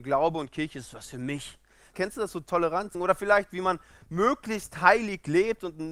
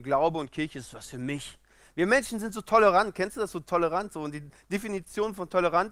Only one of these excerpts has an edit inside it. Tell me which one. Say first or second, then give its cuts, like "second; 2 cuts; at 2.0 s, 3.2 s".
first; 2 cuts; at 1.9 s, 2.9 s